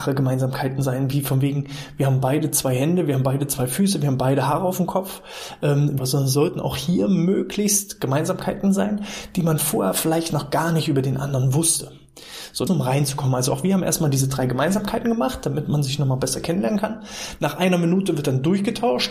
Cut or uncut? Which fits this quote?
cut